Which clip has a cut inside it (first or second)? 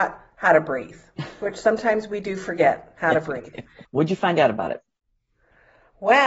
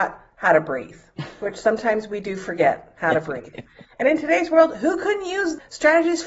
first